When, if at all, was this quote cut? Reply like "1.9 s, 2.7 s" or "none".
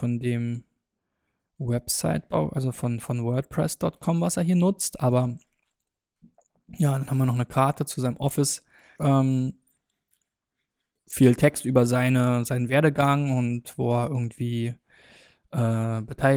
9.0 s